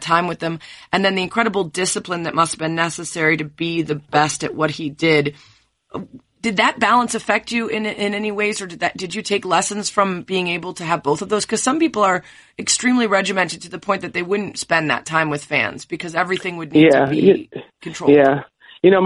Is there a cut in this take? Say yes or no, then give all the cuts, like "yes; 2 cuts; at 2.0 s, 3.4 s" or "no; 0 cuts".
no; 0 cuts